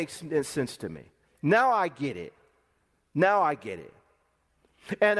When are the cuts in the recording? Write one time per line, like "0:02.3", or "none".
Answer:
none